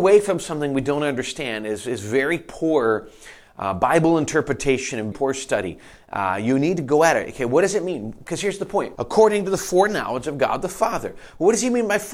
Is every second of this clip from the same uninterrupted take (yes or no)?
no